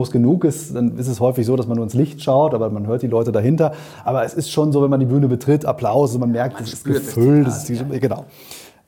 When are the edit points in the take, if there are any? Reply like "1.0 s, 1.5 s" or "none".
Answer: none